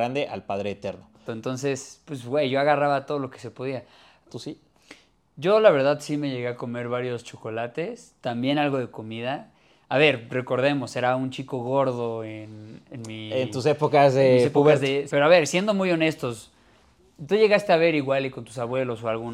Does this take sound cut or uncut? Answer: cut